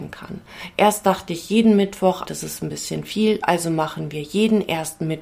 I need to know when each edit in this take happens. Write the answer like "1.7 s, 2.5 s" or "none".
2.3 s

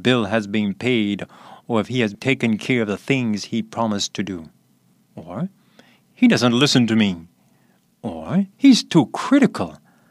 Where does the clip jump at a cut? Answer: 5.1 s, 8.5 s

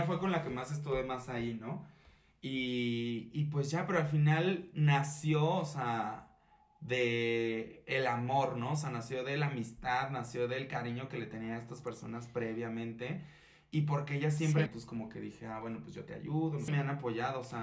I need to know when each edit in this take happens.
14.7 s, 16.7 s

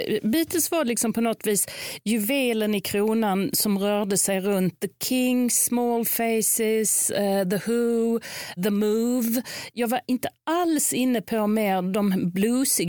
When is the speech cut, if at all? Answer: 8.6 s

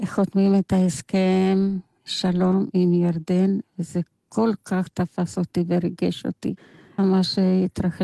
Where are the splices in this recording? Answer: 7.0 s

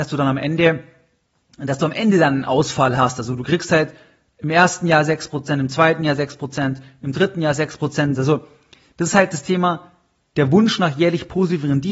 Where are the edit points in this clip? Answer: 8.1 s

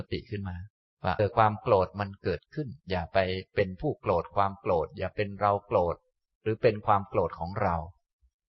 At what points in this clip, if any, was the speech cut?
1.2 s, 2.8 s

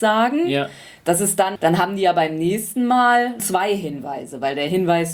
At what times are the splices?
1.6 s, 3.4 s

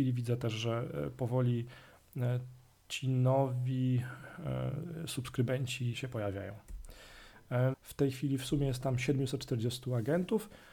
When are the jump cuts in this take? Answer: 5.9 s, 7.7 s

